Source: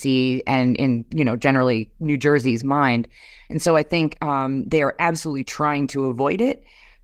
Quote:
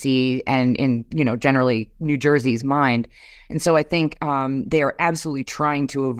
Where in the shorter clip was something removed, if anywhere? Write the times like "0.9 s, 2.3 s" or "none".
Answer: none